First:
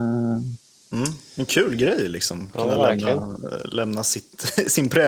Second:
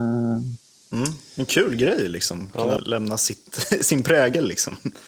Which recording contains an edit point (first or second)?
second